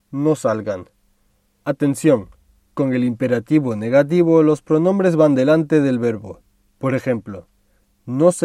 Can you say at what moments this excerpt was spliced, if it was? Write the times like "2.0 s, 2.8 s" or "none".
1.6 s